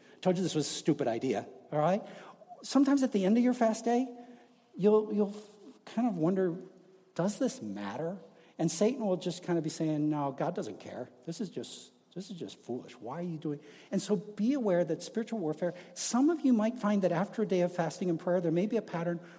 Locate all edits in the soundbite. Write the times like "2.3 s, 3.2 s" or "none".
none